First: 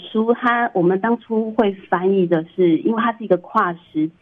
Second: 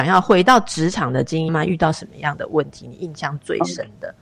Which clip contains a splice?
second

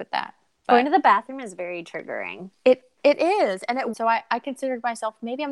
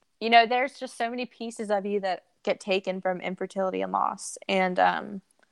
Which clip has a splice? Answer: first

